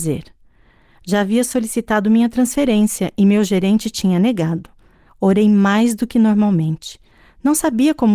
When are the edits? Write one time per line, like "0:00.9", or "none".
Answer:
0:05.1